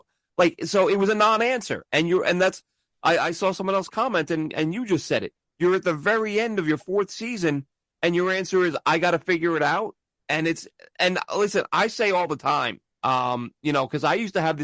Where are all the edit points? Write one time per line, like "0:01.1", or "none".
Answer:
0:05.4
0:12.9

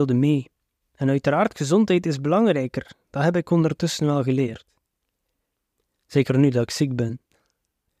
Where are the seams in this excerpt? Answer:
none

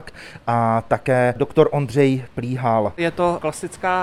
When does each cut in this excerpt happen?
none

